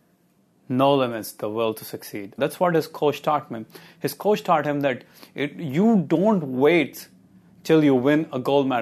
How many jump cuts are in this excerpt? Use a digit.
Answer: 1